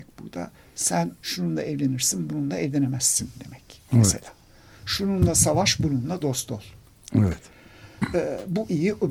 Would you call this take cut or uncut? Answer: uncut